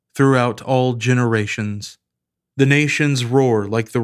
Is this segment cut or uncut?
cut